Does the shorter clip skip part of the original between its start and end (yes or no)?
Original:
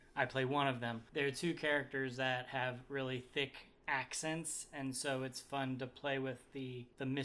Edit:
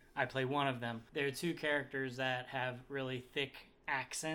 no